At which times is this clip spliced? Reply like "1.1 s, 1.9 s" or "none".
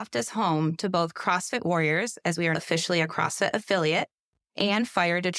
2.5 s